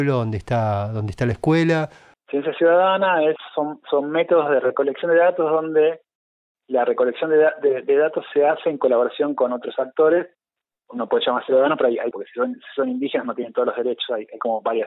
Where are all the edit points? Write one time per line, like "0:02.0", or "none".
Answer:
0:02.1
0:12.1